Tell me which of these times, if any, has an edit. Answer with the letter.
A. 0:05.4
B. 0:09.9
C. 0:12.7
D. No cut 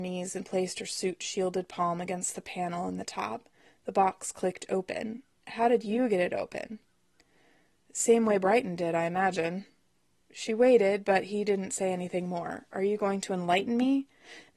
D